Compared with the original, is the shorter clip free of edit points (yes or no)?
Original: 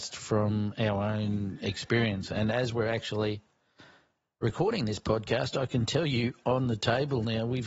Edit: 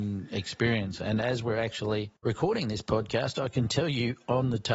no